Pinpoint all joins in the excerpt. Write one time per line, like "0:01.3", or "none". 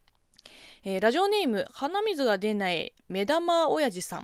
none